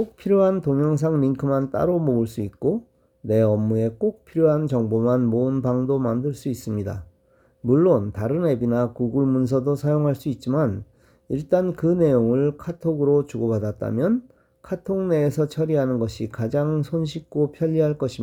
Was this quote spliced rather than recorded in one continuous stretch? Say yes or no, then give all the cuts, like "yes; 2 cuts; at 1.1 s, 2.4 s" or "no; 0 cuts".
no; 0 cuts